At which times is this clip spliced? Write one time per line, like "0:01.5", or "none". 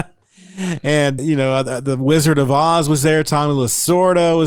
0:01.2